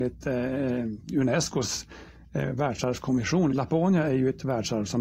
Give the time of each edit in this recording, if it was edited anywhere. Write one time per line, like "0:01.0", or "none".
none